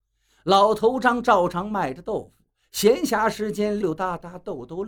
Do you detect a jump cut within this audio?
yes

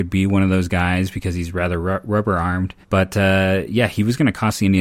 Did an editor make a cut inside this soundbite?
yes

